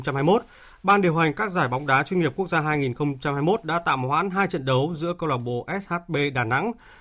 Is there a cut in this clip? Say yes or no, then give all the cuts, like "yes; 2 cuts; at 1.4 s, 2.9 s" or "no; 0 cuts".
no; 0 cuts